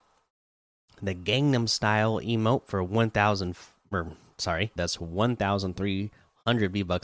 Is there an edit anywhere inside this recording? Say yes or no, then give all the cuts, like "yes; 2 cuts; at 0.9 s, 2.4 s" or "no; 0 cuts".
yes; 1 cut; at 4.8 s